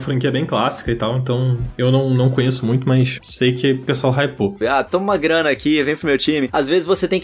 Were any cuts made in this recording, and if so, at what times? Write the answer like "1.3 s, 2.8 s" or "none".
4.6 s